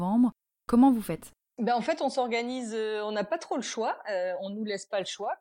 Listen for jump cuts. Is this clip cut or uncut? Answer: uncut